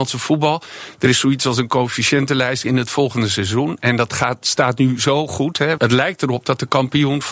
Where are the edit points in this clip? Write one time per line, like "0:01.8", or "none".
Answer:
0:02.6
0:05.8